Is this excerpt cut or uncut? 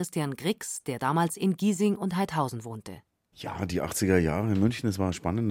uncut